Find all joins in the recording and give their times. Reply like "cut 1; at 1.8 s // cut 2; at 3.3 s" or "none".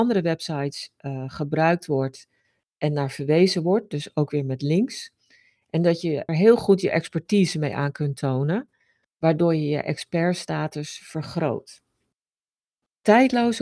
cut 1; at 6.3 s